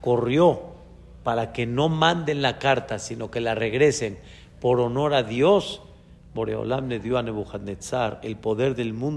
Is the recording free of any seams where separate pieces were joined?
yes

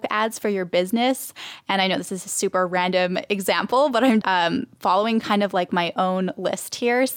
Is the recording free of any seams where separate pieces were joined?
no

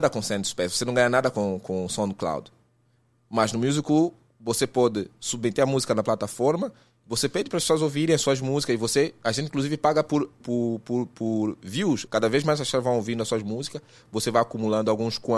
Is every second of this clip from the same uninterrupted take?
no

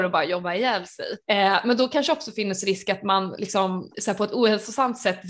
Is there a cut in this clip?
yes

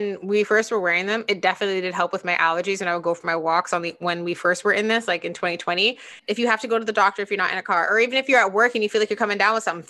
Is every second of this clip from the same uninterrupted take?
no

